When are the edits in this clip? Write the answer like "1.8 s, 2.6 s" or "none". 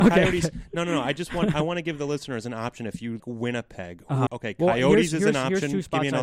3.2 s, 4.3 s